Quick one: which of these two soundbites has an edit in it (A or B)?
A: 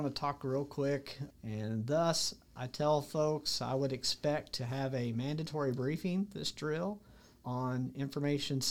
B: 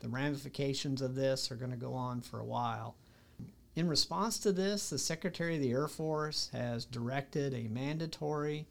A